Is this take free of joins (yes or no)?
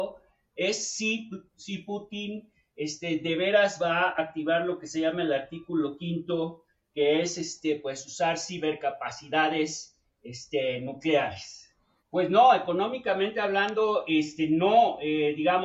no